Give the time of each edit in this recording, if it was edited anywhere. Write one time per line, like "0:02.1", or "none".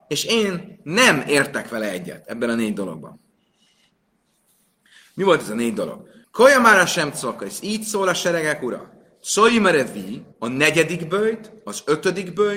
0:06.2
0:10.3